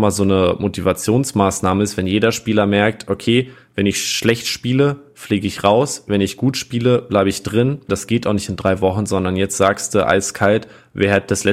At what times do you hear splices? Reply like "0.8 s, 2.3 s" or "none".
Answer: 7.9 s